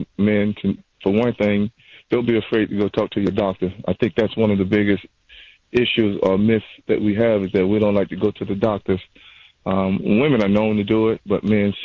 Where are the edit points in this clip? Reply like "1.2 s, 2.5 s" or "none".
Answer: none